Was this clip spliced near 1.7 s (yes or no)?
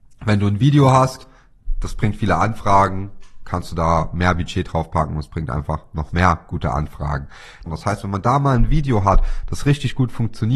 no